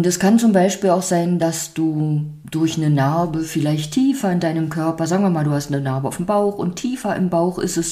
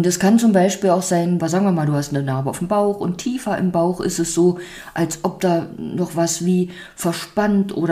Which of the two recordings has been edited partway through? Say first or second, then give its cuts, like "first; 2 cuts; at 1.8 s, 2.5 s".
second; 1 cut; at 1.4 s